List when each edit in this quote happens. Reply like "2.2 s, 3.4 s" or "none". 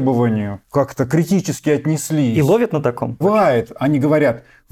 3.2 s